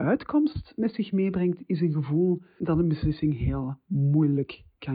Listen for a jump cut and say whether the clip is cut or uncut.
uncut